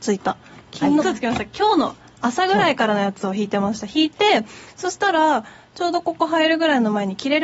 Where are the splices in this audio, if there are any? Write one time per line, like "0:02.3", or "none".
0:01.0